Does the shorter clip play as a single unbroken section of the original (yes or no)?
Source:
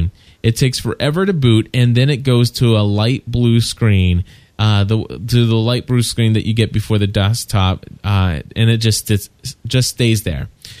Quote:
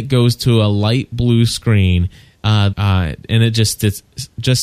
no